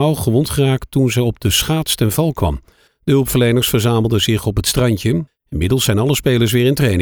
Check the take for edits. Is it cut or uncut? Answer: cut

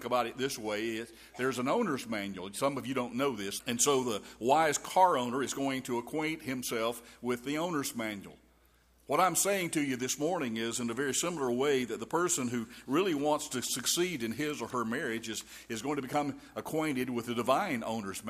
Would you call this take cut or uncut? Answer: cut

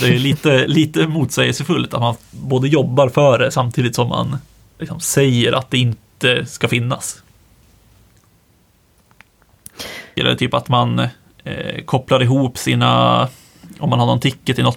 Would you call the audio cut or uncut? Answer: cut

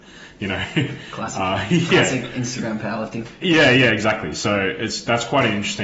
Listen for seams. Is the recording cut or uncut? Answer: uncut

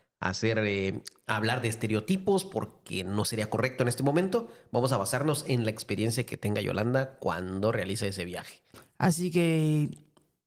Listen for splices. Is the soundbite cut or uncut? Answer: uncut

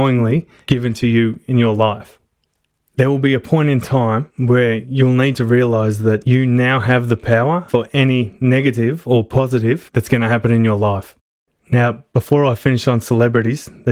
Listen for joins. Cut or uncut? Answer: uncut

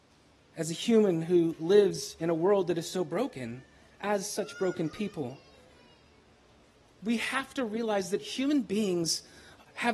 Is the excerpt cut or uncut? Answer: uncut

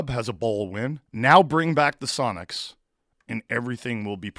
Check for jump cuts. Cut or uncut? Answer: cut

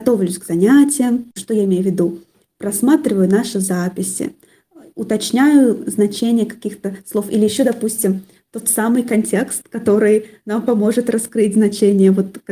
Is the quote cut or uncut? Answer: uncut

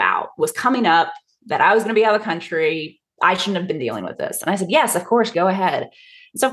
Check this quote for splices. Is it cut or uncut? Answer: cut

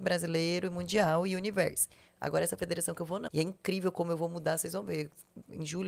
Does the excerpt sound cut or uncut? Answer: cut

